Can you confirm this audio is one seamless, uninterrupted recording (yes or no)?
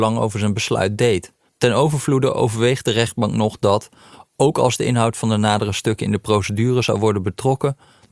no